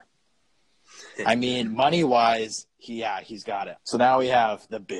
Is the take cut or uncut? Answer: cut